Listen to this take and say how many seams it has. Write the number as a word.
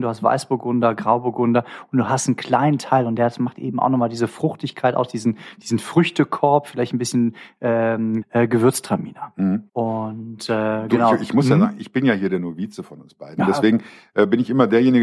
two